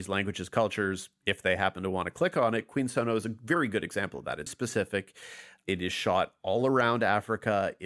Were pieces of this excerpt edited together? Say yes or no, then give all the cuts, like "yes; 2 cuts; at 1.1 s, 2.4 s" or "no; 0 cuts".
yes; 1 cut; at 4.5 s